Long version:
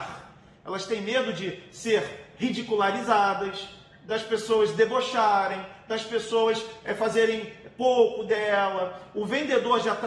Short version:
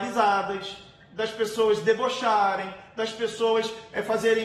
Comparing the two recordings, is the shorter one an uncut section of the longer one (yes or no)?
yes